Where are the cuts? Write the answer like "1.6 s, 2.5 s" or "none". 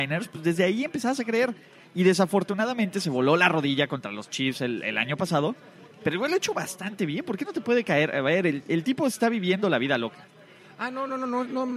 none